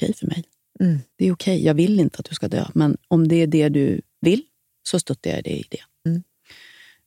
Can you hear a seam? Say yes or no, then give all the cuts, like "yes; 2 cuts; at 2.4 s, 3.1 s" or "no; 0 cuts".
yes; 2 cuts; at 1.1 s, 6.1 s